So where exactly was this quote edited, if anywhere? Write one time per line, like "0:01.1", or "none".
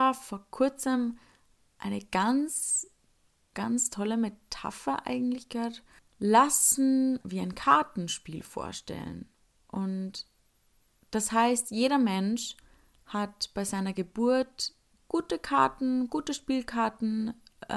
0:06.0
0:07.2